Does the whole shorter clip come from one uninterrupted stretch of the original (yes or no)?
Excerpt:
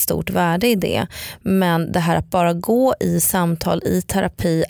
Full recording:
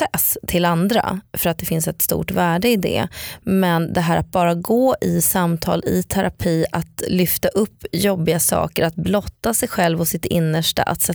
yes